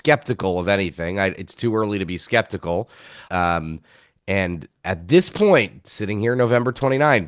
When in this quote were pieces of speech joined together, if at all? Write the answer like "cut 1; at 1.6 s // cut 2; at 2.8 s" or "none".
cut 1; at 3.2 s // cut 2; at 4.8 s